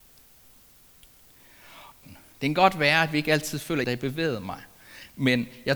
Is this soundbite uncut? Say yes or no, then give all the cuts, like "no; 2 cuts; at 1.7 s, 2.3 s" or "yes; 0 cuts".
no; 2 cuts; at 2.0 s, 3.8 s